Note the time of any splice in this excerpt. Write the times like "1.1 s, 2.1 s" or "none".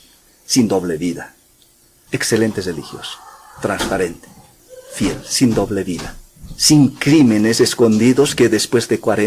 2.1 s